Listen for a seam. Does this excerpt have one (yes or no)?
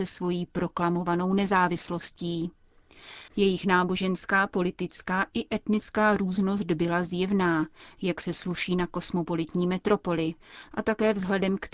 yes